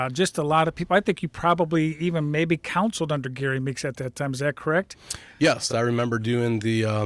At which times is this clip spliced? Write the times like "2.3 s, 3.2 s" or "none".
none